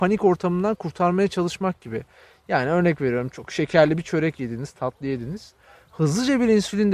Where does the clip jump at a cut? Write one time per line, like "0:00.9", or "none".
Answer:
none